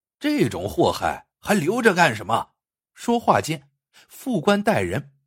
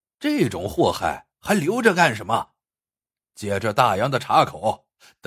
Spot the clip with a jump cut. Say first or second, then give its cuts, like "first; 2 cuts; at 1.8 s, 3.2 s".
first; 1 cut; at 2.8 s